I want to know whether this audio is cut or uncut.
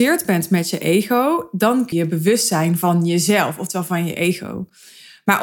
cut